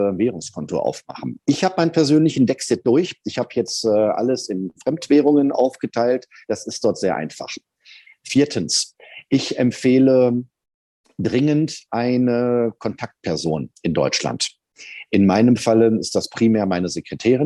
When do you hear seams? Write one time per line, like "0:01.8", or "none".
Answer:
none